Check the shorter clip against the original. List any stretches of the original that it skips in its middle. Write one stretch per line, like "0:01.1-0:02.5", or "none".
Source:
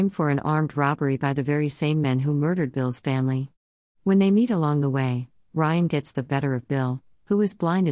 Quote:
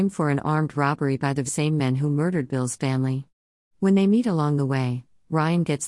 0:01.5-0:01.7